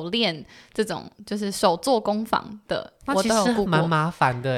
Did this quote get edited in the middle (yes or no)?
no